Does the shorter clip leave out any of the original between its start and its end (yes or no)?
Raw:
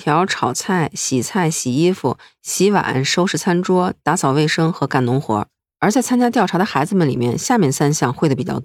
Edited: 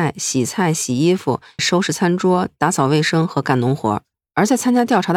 yes